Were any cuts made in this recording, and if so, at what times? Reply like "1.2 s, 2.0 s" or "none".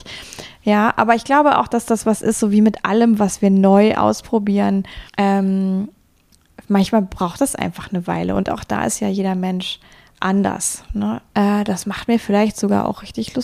5.1 s, 11.3 s